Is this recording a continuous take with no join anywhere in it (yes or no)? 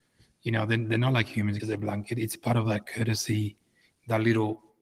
no